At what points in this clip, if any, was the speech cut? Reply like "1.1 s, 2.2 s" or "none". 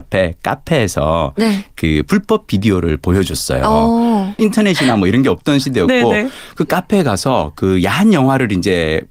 4.4 s